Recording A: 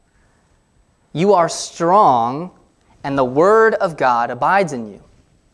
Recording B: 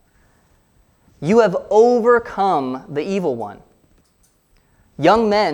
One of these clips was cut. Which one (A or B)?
B